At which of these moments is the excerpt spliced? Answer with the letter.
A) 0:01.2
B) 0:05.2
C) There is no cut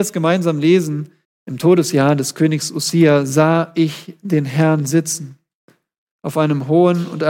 A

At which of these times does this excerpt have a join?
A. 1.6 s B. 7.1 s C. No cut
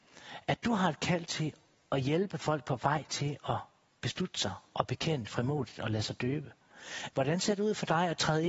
B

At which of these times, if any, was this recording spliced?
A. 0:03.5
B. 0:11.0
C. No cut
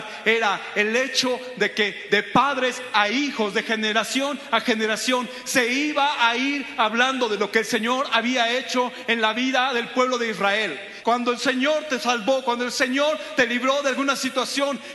B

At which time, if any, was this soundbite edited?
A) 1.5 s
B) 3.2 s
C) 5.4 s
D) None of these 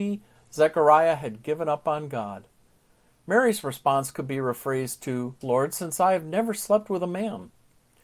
C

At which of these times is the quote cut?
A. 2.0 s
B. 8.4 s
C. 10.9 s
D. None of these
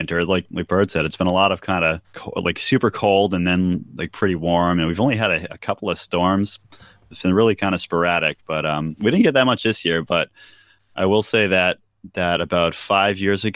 A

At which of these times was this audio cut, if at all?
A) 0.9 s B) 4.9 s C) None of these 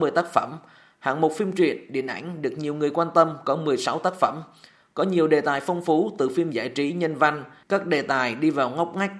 C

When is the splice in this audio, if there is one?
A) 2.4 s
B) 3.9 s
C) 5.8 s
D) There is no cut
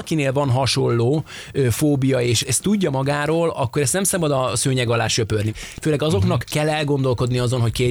A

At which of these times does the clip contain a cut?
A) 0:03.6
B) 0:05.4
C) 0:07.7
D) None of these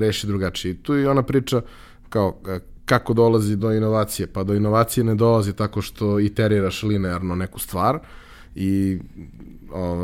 A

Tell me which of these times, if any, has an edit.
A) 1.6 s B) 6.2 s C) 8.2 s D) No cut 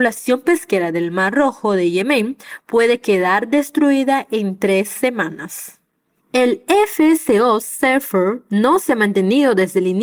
B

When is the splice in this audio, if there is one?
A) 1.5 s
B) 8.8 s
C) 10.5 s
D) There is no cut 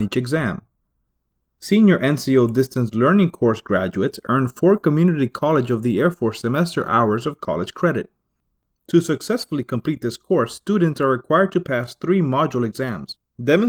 B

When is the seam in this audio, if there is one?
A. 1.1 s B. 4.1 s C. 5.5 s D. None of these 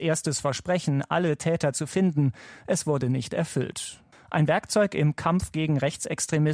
B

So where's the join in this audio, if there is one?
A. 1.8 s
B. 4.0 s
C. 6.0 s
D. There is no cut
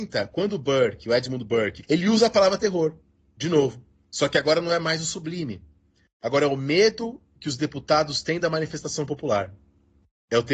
A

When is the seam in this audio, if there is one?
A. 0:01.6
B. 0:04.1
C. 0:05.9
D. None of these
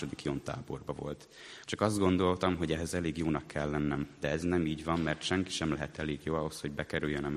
A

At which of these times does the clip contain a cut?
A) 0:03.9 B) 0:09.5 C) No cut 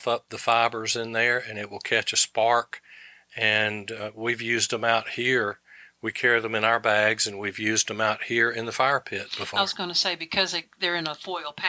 C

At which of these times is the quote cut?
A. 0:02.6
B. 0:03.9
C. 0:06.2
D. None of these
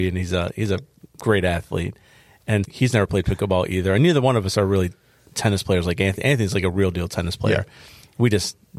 A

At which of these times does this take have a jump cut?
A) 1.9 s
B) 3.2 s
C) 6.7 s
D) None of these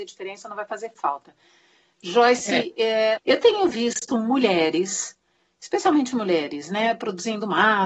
B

